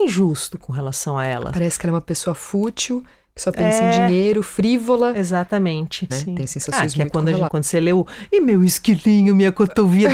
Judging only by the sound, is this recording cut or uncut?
cut